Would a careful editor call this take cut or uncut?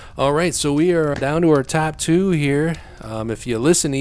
cut